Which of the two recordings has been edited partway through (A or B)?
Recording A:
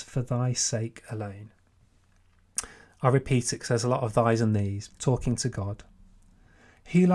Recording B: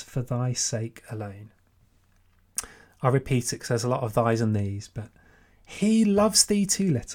A